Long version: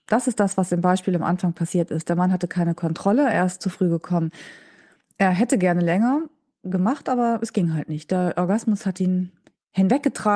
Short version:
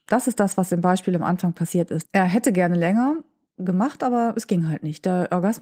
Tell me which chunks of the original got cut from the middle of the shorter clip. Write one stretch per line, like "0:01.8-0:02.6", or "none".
0:02.0-0:05.1